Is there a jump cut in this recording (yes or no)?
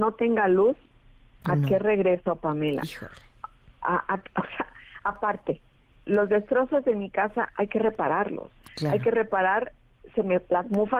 no